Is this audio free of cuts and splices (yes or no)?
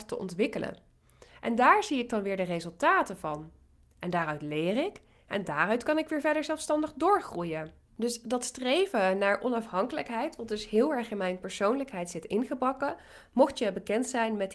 yes